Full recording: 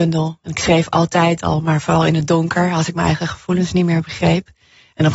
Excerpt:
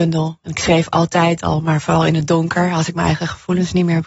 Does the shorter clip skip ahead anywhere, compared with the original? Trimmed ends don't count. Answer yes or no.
no